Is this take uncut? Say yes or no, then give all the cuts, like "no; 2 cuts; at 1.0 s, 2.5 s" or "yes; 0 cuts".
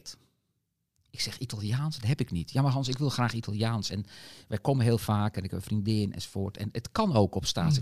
yes; 0 cuts